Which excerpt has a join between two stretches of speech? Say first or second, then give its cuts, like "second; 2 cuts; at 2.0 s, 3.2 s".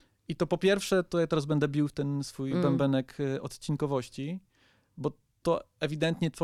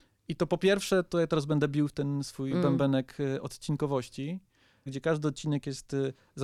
second; 1 cut; at 4.9 s